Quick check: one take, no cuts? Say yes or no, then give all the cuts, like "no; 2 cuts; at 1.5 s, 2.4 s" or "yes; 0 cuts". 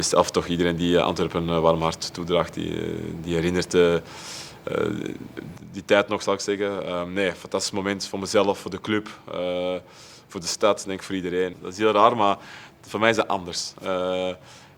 no; 1 cut; at 11.5 s